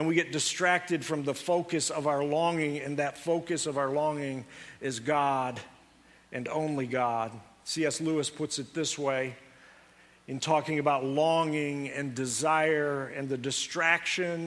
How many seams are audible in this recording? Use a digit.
0